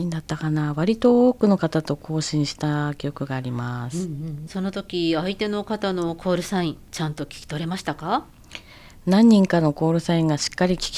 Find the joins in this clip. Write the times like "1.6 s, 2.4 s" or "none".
4.5 s